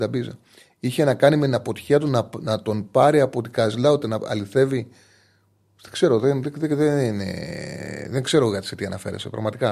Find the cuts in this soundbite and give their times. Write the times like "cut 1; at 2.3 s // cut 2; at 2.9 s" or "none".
none